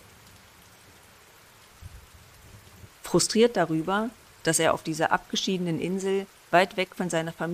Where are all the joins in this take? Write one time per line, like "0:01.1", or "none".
0:02.9